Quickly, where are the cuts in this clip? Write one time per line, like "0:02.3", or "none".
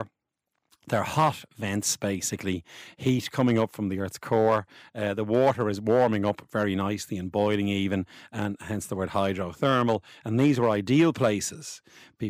none